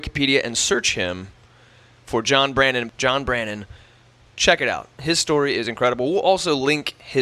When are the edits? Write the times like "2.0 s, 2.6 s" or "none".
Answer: 2.9 s